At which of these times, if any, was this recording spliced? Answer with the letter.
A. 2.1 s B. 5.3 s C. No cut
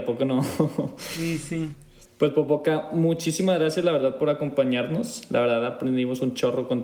A